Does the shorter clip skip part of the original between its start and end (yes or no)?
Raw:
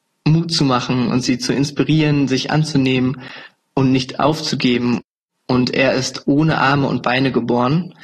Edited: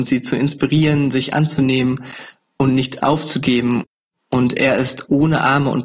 no